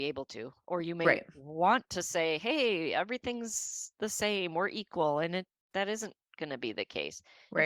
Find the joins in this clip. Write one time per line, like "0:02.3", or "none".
none